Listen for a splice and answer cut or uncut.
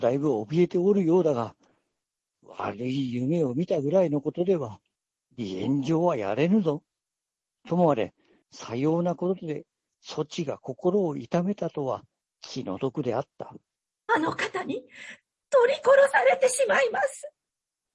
cut